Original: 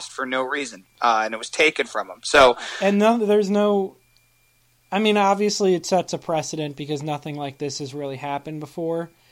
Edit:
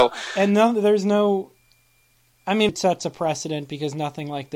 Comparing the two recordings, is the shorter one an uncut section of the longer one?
no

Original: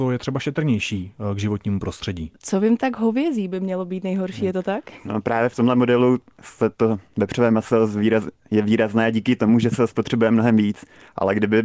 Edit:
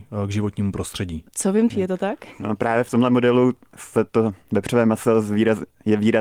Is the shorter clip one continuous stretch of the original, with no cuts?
no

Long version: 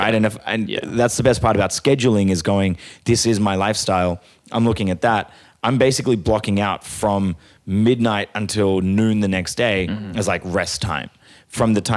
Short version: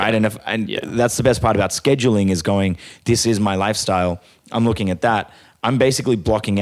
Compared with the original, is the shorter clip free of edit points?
yes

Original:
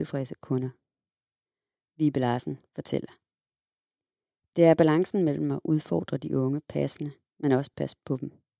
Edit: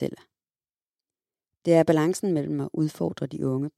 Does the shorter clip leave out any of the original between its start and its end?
no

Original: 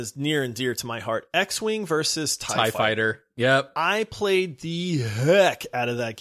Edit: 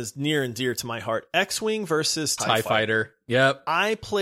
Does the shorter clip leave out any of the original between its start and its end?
yes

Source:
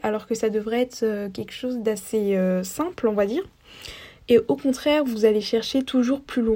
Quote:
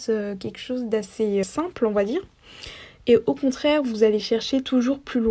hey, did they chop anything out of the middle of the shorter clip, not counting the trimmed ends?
yes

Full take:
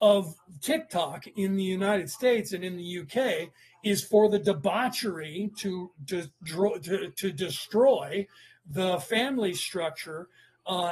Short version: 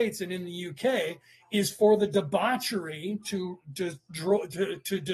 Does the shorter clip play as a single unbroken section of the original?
yes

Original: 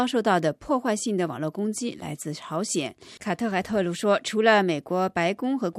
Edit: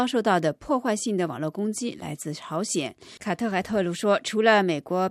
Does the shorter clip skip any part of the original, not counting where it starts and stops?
no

